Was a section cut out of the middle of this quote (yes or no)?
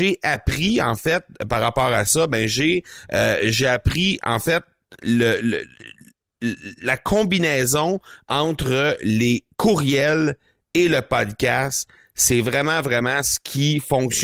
yes